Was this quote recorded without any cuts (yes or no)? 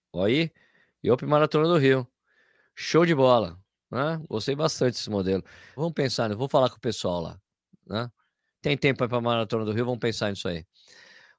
no